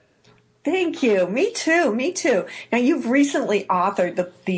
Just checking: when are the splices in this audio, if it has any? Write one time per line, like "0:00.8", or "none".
none